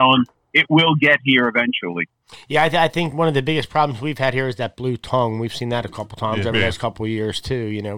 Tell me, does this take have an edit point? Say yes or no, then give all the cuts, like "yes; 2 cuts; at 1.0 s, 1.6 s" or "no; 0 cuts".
no; 0 cuts